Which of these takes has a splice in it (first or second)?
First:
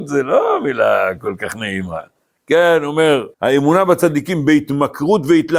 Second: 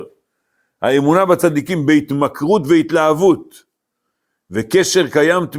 first